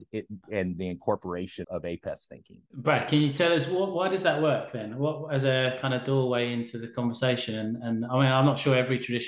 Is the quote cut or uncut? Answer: cut